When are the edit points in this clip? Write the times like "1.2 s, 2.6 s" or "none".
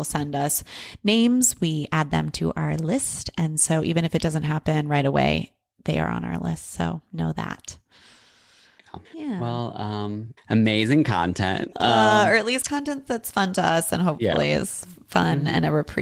9.0 s, 10.4 s, 11.7 s